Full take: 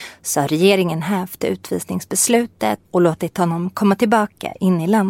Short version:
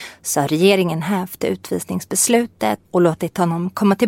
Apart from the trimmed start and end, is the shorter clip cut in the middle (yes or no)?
no